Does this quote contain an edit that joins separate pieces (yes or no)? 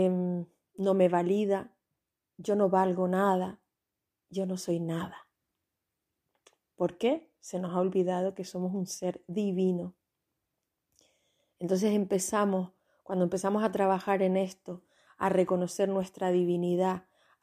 no